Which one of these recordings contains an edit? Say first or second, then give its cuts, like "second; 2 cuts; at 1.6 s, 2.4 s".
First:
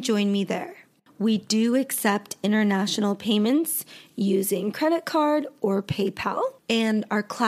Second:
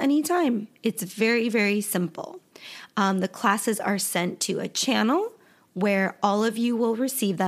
first; 1 cut; at 6.6 s